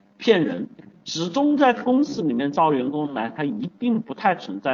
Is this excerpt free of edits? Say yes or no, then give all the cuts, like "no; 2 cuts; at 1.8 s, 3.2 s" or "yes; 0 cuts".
yes; 0 cuts